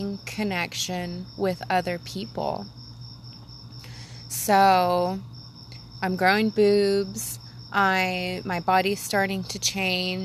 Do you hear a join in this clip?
no; 0 cuts

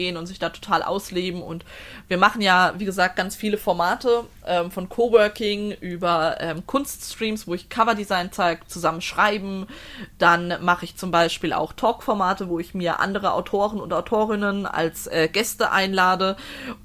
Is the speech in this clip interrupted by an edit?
no; 0 cuts

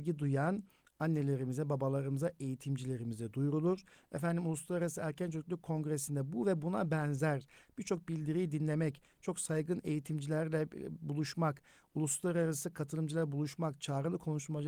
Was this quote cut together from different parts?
no; 0 cuts

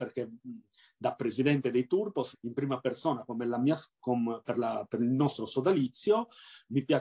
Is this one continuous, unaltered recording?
no; 1 cut; at 2.3 s

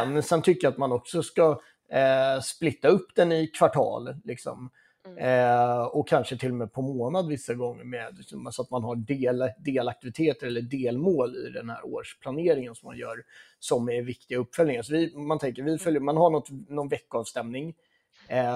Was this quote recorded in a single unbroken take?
yes; 0 cuts

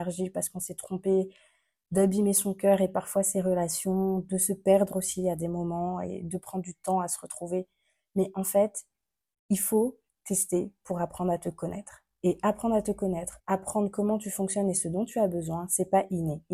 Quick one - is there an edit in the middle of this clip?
yes; 1 cut; at 13.4 s

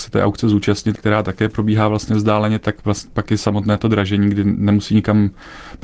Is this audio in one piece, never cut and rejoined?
no; 1 cut; at 1.0 s

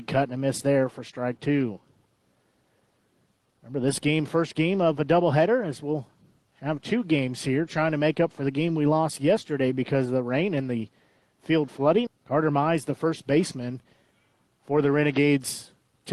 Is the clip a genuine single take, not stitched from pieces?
no; 1 cut; at 12.1 s

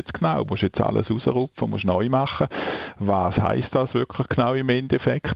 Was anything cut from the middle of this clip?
no; 0 cuts

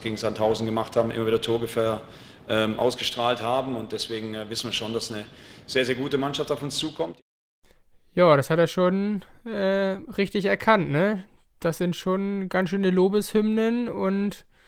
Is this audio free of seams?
yes; 0 cuts

